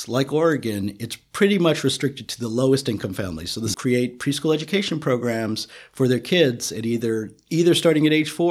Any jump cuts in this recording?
yes; 1 cut; at 3.7 s

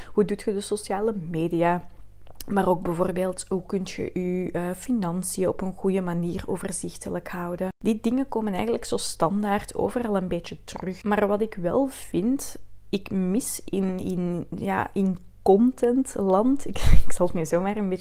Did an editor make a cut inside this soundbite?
no; 0 cuts

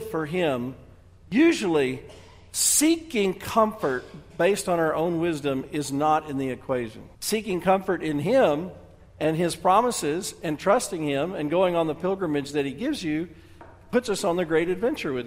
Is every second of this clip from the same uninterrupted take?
no; 1 cut; at 7.1 s

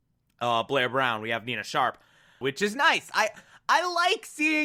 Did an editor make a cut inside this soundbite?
yes; 1 cut; at 2.4 s

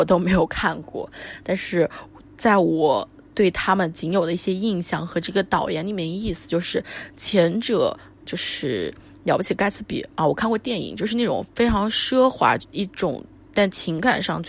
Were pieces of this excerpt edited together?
yes; 2 cuts; at 8.2 s, 12.6 s

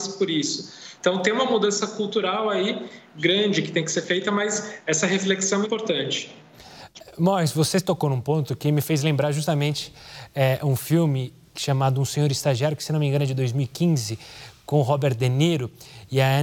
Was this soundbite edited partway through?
yes; 2 cuts; at 1.0 s, 5.6 s

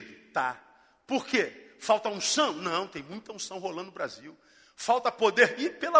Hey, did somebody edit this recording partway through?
no; 0 cuts

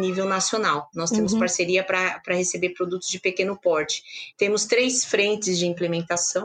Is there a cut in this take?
yes; 2 cuts; at 0.9 s, 4.3 s

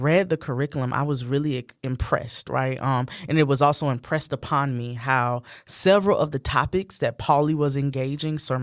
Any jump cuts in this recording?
no; 0 cuts

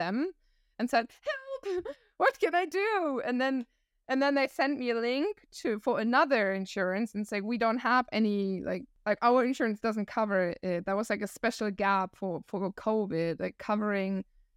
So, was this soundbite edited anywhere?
no; 0 cuts

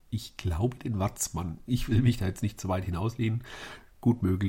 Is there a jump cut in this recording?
no; 0 cuts

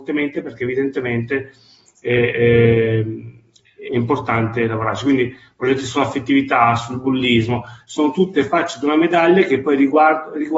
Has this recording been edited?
yes; 1 cut; at 7.8 s

